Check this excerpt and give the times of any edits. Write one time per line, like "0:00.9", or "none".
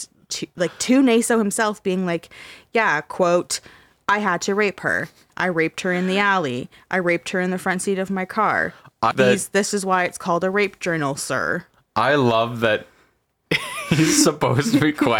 0:05.3
0:09.1